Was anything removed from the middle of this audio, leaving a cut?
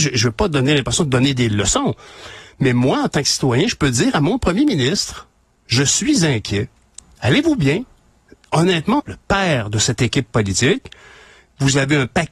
yes; 1 cut; at 9.0 s

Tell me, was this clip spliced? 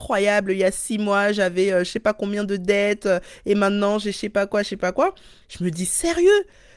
yes; 1 cut; at 5.4 s

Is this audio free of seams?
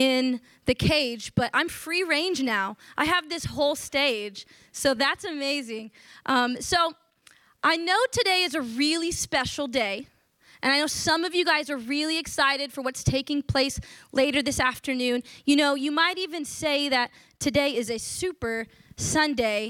yes; 0 cuts

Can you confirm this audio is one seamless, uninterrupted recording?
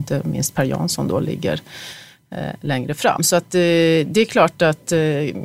yes; 0 cuts

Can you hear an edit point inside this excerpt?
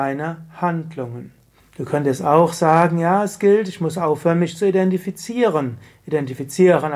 yes; 1 cut; at 1.6 s

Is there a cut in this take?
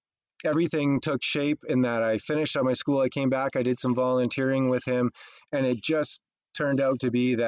no; 0 cuts

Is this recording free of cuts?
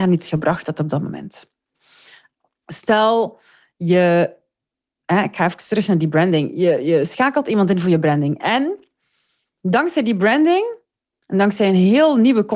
yes; 0 cuts

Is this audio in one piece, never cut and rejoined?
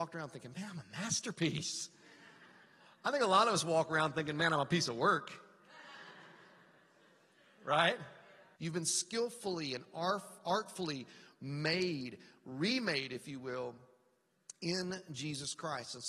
no; 1 cut; at 8.5 s

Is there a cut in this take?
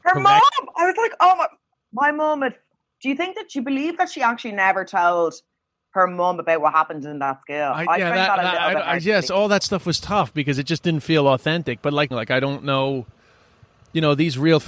yes; 1 cut; at 12.1 s

